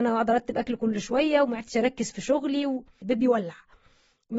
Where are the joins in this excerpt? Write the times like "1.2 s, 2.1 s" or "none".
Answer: 3.0 s